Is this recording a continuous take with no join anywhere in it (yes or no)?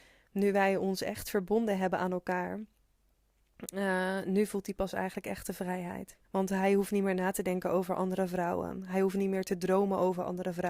no